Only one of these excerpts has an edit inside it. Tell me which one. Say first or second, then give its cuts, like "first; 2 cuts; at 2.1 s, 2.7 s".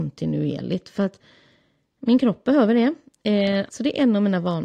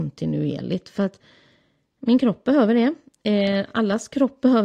first; 1 cut; at 3.7 s